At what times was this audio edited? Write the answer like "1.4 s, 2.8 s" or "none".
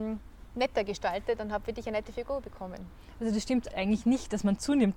3.7 s